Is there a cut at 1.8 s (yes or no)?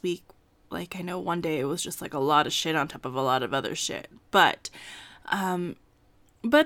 no